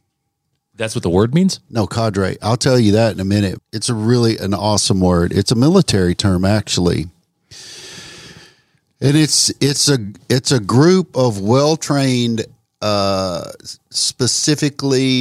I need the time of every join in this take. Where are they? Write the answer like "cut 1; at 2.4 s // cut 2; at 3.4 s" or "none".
cut 1; at 3.6 s